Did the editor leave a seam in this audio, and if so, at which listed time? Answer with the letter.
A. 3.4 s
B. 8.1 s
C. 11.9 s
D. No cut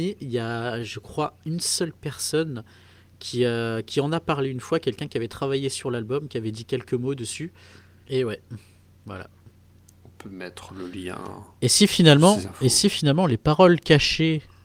B